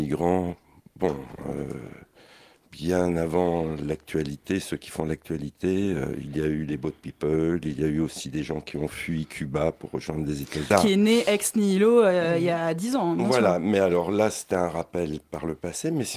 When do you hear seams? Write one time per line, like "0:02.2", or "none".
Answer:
0:10.7